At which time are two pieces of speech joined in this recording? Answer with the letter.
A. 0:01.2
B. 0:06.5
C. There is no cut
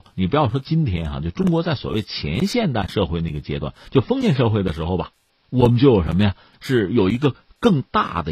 B